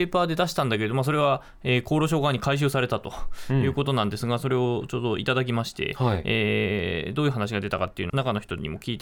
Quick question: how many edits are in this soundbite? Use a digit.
1